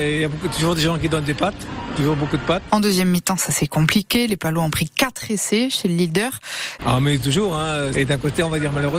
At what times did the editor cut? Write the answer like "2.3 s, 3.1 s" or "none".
2.7 s, 6.8 s, 7.9 s